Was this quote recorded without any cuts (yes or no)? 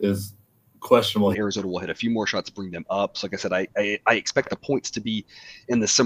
no